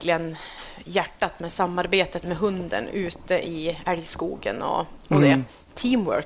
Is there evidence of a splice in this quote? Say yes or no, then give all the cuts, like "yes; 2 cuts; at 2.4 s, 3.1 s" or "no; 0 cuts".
no; 0 cuts